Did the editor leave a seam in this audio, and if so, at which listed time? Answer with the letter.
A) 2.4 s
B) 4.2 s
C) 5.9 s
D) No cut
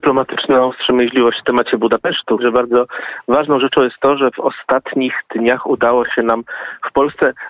A